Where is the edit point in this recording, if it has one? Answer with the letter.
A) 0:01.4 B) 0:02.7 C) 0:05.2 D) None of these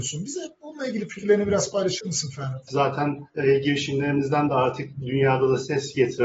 B